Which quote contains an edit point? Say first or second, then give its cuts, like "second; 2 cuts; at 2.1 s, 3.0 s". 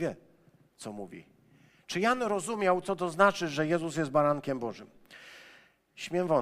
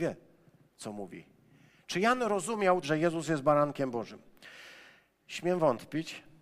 second; 1 cut; at 2.8 s